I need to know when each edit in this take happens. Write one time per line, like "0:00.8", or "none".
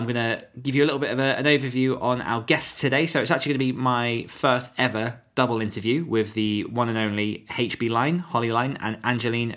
none